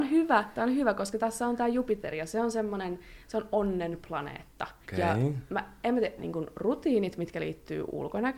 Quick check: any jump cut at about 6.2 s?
yes; 2 cuts; at 4.8 s, 6.2 s

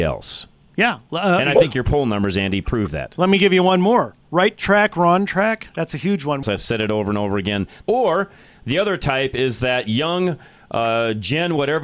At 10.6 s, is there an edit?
no; 2 cuts; at 6.4 s, 7.8 s

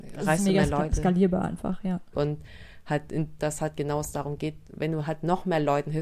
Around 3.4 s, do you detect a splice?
yes; 2 cuts; at 2.1 s, 3.4 s

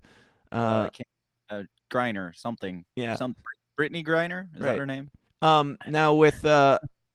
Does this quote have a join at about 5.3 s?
yes; 1 cut; at 5.3 s

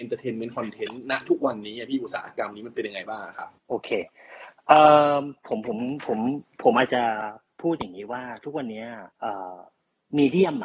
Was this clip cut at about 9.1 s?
yes; 2 cuts; at 3.6 s, 9.1 s

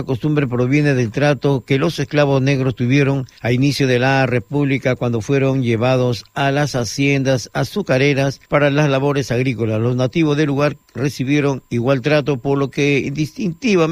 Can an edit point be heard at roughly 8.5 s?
yes; 2 cuts; at 3.4 s, 8.5 s

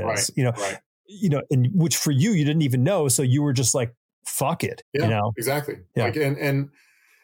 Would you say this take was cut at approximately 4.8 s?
yes; 1 cut; at 4.8 s

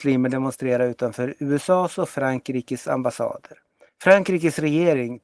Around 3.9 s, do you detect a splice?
yes; 1 cut; at 3.9 s

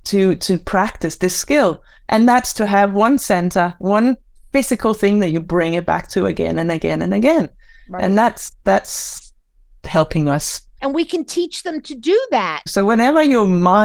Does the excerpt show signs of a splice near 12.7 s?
yes; 2 cuts; at 10.8 s, 12.7 s

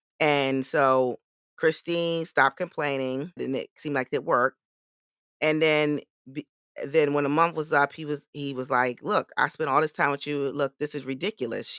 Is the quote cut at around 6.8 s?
no; 1 cut; at 3.4 s

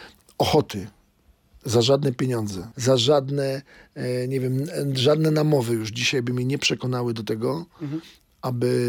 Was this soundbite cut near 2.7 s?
yes; 1 cut; at 2.7 s

